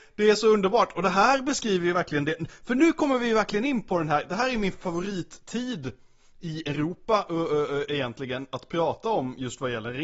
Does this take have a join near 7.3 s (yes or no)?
no